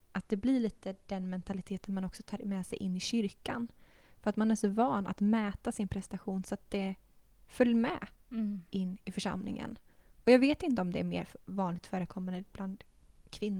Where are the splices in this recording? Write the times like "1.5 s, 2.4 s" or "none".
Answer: none